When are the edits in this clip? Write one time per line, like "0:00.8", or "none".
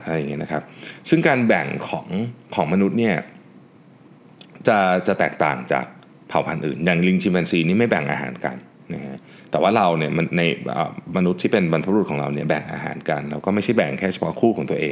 0:02.4